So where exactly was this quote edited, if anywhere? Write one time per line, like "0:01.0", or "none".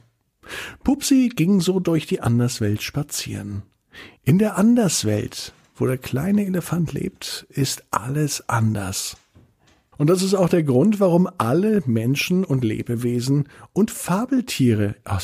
0:04.2
0:09.9